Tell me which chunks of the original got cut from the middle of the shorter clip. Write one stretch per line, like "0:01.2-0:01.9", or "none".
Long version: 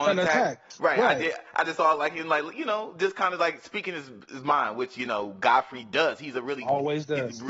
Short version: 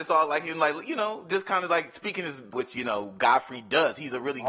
0:04.2-0:04.7